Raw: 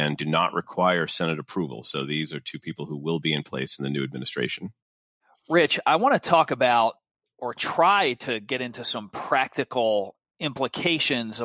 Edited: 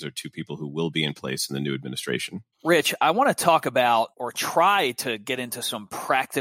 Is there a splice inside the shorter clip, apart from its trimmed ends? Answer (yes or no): yes